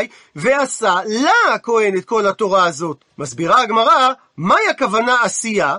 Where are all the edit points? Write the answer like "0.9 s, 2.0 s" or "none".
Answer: 3.1 s